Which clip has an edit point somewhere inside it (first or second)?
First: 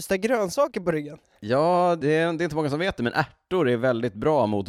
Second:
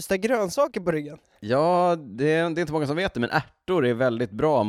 first